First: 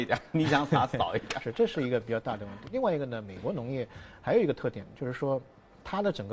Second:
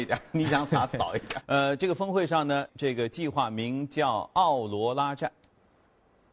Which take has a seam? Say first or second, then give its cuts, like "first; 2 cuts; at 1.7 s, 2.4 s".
second; 2 cuts; at 1.4 s, 2.7 s